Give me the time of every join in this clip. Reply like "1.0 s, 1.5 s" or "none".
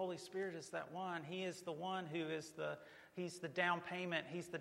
none